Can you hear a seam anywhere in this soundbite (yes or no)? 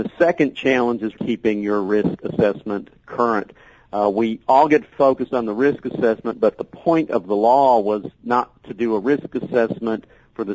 yes